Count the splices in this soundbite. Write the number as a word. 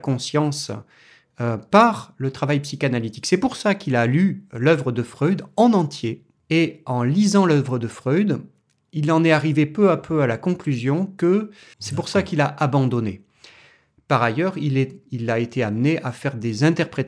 one